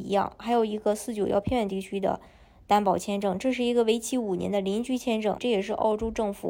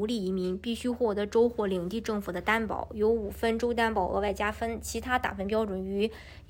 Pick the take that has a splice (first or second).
first